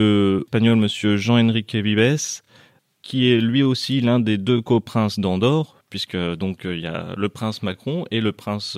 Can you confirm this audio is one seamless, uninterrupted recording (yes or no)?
yes